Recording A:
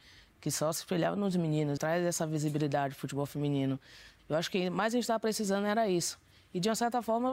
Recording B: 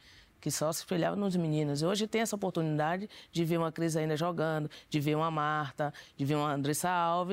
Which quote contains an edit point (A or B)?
A